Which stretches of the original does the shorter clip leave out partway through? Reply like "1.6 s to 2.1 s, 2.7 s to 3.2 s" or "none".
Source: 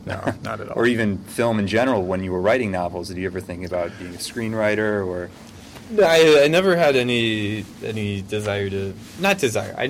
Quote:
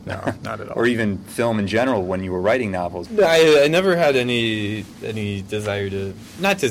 3.0 s to 5.8 s